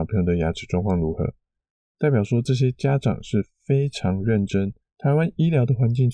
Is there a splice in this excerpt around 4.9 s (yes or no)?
yes